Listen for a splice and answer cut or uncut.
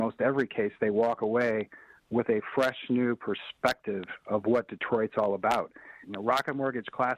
cut